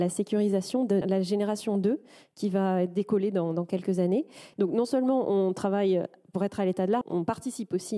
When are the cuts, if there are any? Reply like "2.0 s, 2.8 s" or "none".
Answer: 1.0 s, 4.5 s, 7.0 s